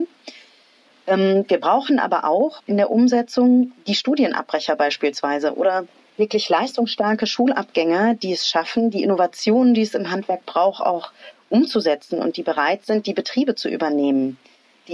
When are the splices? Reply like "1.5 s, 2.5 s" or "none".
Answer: 2.6 s

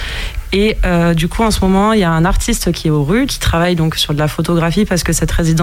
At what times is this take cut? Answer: 3.3 s

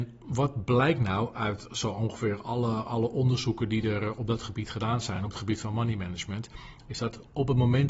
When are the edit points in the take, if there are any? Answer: none

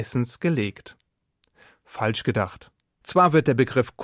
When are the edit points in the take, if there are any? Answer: 3.0 s

